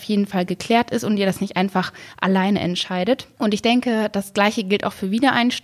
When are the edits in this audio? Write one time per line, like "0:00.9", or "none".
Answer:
none